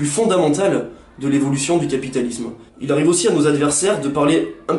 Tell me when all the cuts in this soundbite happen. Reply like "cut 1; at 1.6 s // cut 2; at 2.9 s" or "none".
cut 1; at 2.7 s